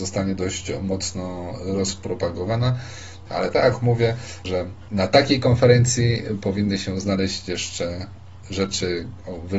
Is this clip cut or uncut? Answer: cut